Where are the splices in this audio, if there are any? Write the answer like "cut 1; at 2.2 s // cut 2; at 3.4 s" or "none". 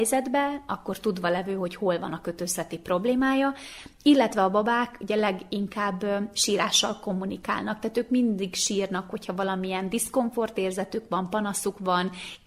none